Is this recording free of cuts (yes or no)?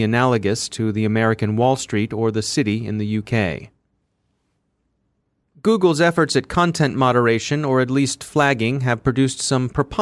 yes